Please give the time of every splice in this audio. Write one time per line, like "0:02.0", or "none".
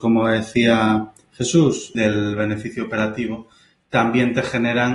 0:01.9